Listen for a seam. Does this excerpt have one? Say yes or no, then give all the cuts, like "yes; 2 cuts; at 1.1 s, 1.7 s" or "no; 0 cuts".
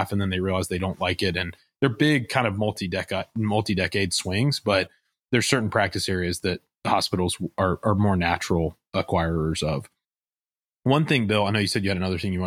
no; 0 cuts